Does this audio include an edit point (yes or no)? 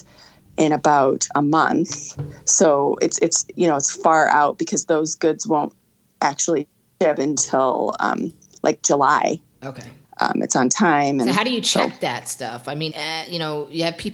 yes